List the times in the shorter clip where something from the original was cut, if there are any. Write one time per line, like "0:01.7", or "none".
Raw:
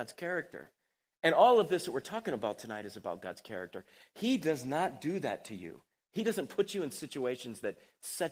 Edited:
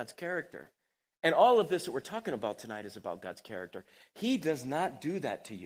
none